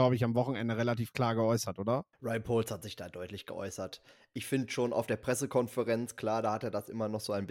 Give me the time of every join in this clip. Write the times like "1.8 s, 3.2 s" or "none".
2.1 s